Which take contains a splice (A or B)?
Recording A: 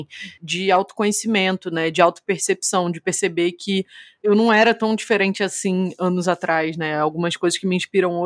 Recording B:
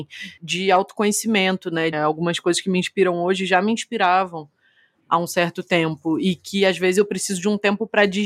B